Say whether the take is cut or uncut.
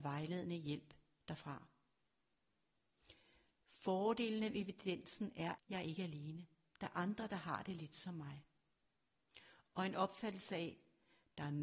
cut